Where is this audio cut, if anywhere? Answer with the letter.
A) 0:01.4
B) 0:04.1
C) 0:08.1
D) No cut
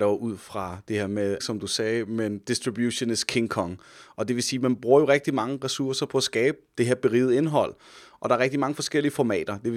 A